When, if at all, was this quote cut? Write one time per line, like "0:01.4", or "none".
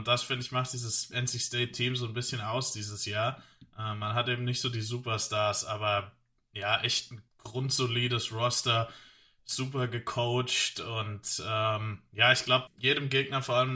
0:07.3
0:12.7